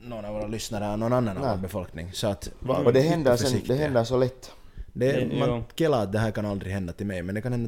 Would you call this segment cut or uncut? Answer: uncut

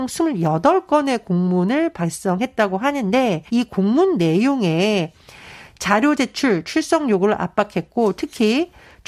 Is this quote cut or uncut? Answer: cut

